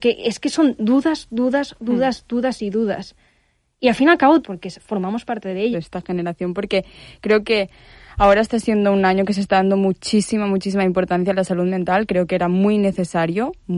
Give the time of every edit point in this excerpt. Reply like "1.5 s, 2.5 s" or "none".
4.4 s, 5.7 s